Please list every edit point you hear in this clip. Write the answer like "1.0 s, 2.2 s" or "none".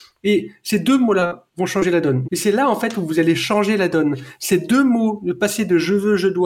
2.2 s